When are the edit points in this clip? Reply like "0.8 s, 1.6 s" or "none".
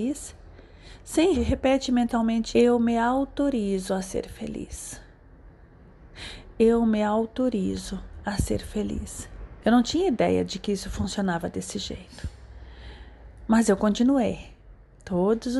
1.3 s, 2.5 s, 9.6 s